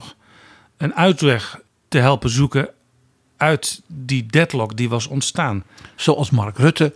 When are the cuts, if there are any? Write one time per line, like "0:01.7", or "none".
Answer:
0:01.7